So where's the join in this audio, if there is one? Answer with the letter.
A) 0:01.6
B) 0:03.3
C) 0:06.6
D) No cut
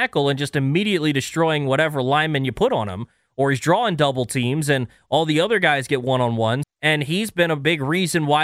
C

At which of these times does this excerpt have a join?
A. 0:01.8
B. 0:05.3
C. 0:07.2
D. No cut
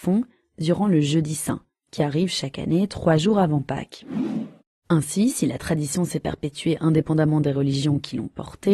D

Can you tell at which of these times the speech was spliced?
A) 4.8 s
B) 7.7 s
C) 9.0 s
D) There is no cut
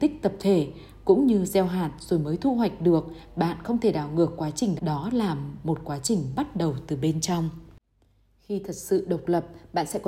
A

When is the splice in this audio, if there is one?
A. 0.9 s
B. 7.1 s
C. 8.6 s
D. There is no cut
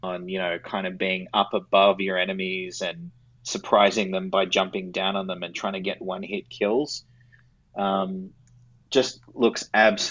D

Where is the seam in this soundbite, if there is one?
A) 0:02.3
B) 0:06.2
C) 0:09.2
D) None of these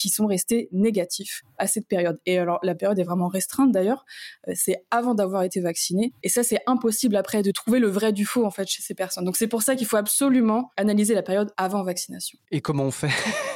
B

